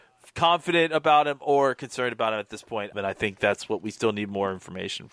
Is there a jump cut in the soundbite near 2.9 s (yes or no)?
yes